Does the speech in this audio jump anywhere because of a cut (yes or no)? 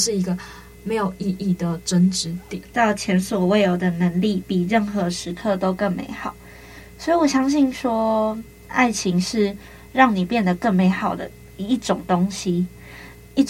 yes